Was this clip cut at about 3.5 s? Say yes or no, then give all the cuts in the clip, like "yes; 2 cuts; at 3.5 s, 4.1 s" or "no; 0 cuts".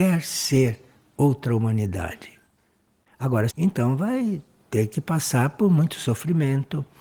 yes; 1 cut; at 3.5 s